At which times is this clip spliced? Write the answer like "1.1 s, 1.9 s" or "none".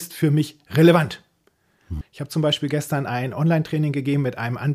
2.0 s